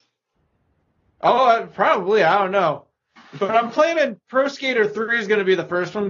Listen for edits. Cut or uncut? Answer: uncut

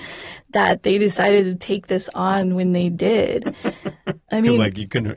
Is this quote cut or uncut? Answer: uncut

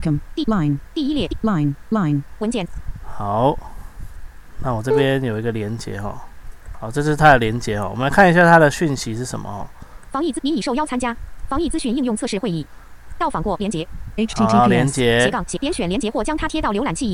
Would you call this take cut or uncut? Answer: cut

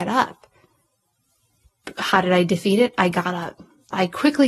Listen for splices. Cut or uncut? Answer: uncut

